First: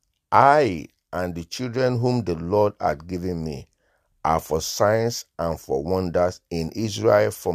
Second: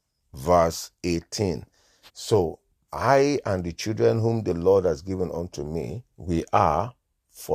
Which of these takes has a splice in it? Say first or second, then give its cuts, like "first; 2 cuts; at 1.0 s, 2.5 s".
second; 2 cuts; at 2.1 s, 6.1 s